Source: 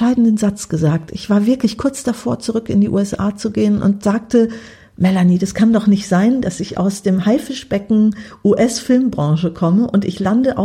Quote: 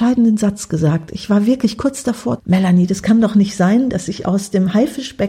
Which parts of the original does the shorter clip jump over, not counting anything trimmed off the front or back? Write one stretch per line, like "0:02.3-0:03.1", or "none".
0:02.4-0:04.9